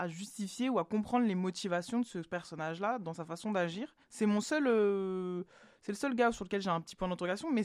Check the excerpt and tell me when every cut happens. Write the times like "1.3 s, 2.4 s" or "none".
4.0 s